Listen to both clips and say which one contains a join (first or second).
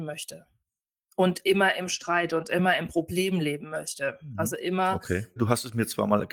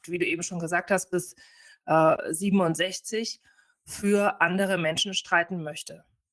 first